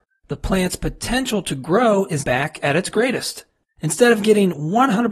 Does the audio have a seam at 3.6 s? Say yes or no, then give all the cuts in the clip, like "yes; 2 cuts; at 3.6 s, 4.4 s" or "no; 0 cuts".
yes; 2 cuts; at 2.2 s, 3.6 s